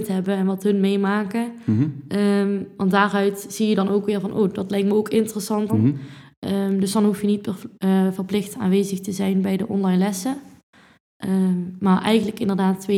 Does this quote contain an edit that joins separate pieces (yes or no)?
yes